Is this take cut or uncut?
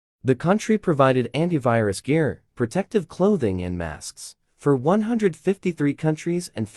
cut